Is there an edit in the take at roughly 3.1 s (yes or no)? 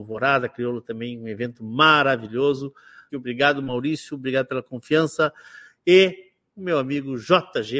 yes